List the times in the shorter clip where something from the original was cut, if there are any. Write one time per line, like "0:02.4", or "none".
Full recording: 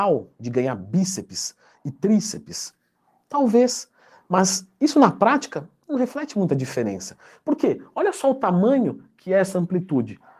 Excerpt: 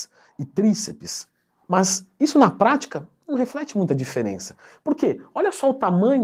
0:01.6